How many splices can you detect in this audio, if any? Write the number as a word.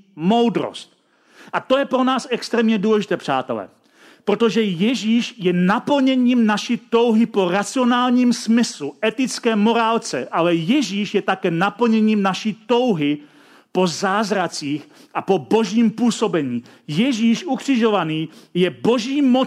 zero